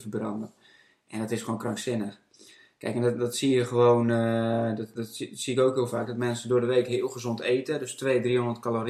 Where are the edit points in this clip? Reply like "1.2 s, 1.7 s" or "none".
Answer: 4.9 s